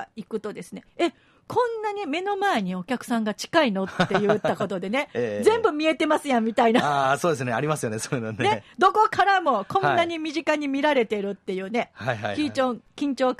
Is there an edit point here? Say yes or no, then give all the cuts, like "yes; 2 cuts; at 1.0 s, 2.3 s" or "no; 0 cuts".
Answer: no; 0 cuts